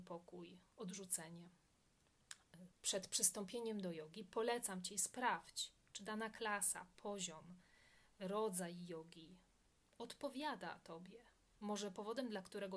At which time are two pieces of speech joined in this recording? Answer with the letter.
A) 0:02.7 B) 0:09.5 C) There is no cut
A